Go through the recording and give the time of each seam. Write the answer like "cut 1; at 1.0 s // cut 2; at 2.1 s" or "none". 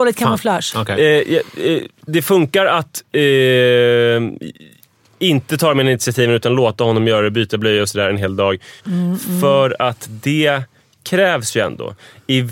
cut 1; at 2.1 s // cut 2; at 8.8 s

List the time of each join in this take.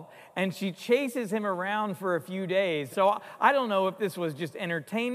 cut 1; at 2.9 s

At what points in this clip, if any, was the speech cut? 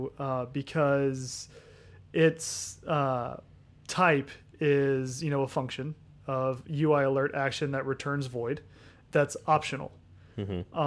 none

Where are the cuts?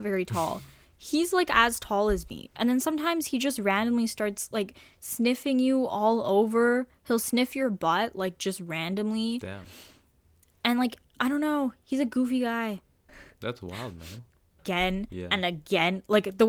cut 1; at 13.1 s // cut 2; at 14.6 s

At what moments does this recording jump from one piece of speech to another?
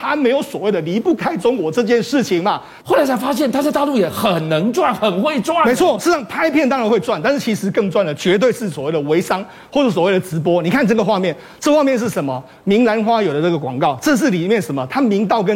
cut 1; at 2.8 s

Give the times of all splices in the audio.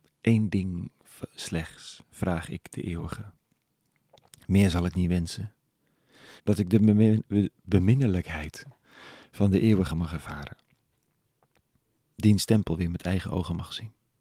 cut 1; at 6.4 s

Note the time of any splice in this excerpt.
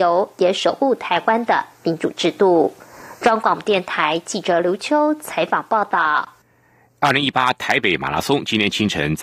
none

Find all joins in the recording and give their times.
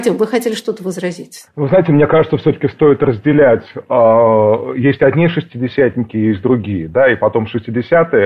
none

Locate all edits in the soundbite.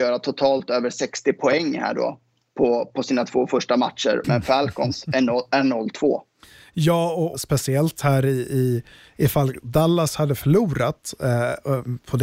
cut 1; at 4.2 s // cut 2; at 7.3 s

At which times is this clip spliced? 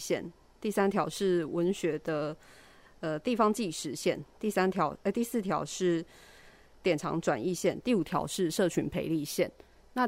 none

